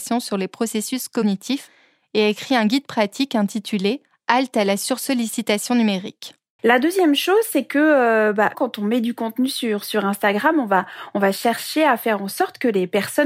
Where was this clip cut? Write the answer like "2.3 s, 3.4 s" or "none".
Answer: 6.6 s, 8.5 s